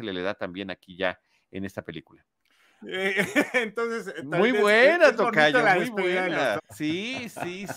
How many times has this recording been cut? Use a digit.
2